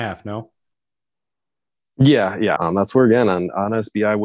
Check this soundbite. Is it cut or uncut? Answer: cut